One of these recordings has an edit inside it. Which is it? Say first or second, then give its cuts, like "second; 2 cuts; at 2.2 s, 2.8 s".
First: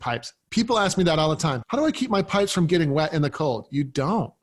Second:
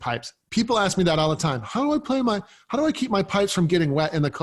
first; 1 cut; at 1.6 s